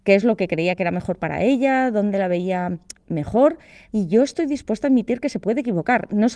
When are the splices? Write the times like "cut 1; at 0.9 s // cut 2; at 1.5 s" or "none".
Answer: cut 1; at 3.9 s

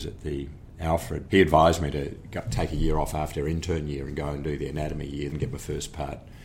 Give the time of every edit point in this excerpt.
cut 1; at 1.3 s // cut 2; at 5.3 s

